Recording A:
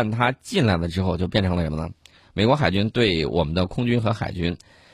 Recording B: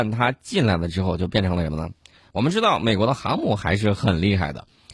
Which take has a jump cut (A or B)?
B